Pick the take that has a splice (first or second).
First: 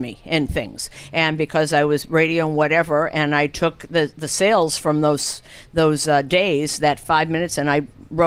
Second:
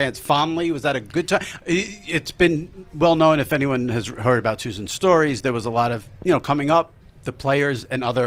second